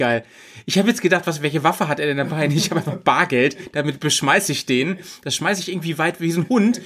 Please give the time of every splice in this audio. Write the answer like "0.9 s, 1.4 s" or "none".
none

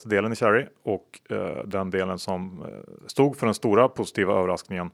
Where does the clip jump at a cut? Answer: none

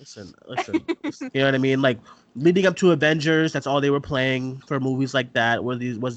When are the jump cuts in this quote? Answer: 1.3 s

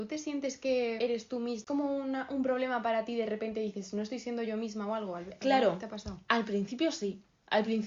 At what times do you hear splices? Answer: none

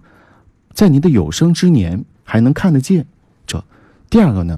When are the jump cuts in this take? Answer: 2.2 s, 3.5 s

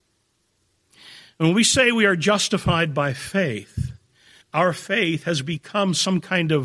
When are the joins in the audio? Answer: 4.4 s

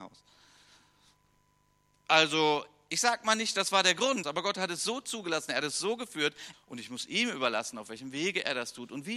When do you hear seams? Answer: 4.2 s, 6.5 s

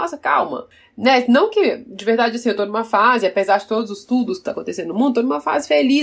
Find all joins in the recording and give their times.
none

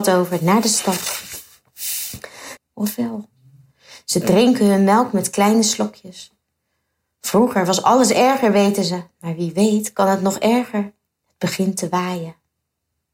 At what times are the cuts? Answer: 2.6 s, 11.1 s

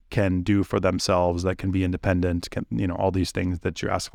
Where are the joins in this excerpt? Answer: none

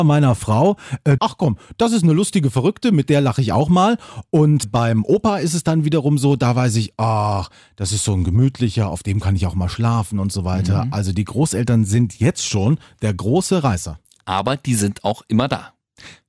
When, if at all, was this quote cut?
1.2 s

